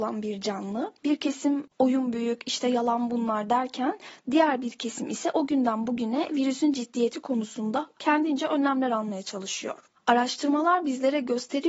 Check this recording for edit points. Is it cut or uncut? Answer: cut